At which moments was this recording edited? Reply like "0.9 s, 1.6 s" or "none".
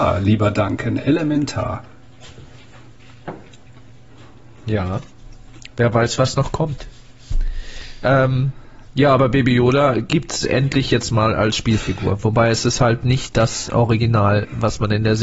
none